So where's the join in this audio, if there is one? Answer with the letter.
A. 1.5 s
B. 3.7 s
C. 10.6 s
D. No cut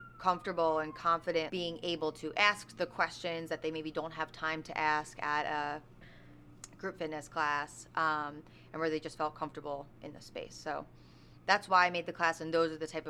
A